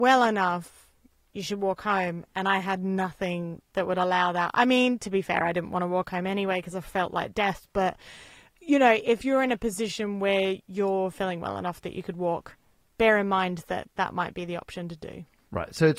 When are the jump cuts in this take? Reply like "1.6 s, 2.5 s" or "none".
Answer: none